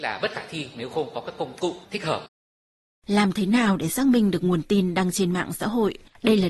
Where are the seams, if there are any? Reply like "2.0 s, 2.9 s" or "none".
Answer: none